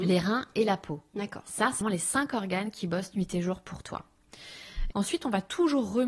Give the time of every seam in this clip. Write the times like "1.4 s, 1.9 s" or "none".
1.8 s, 4.9 s